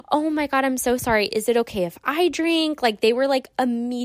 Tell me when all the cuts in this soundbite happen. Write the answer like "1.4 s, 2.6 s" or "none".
none

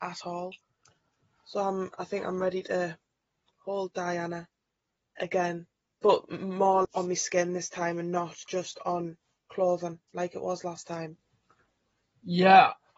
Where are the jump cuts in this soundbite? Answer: 5.2 s, 6.8 s

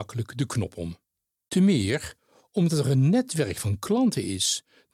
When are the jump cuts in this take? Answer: none

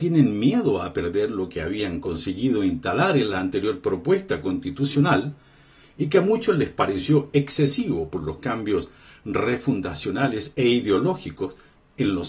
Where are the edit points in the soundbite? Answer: none

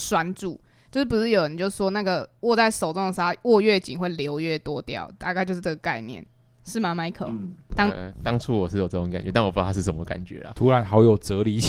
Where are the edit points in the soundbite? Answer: none

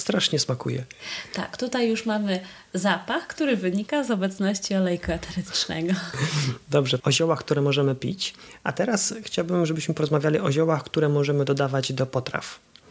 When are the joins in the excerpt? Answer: 7.0 s

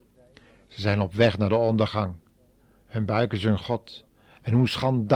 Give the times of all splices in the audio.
none

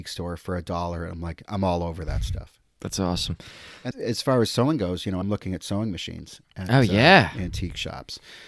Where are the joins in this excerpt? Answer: 3.9 s, 5.2 s

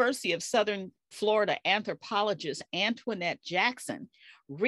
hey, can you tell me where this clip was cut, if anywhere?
1.1 s

